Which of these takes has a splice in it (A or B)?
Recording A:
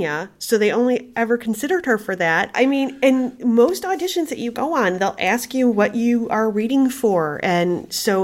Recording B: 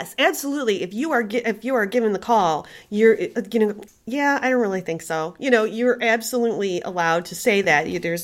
A